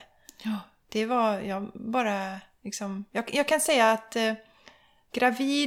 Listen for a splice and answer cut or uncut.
uncut